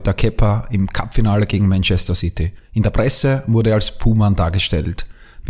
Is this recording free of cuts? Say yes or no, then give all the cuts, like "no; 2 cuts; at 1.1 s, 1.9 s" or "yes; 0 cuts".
yes; 0 cuts